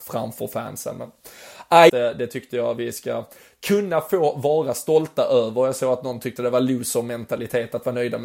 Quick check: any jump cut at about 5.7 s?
no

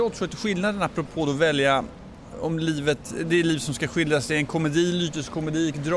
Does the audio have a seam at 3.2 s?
no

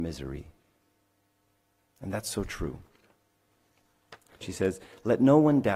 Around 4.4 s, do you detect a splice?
yes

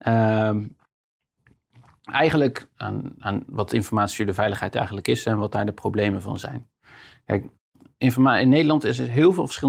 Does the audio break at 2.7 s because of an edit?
yes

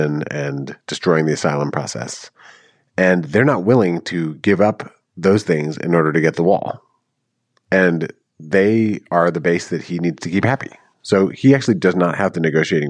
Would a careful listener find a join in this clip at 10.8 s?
no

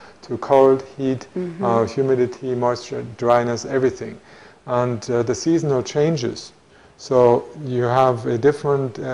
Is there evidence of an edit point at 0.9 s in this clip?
no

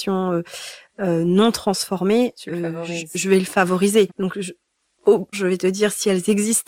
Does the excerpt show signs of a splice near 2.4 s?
no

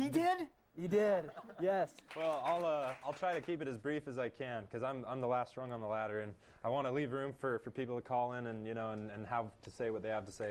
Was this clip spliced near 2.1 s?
yes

